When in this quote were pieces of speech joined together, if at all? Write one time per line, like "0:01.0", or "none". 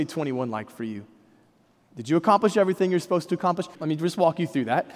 0:03.7